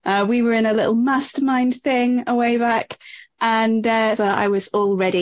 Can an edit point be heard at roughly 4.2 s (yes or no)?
yes